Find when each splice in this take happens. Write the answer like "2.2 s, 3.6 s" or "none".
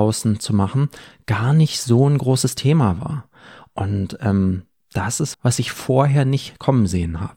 5.3 s